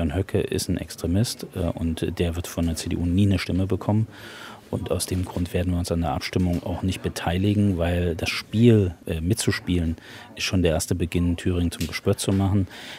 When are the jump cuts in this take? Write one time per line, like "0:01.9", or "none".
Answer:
none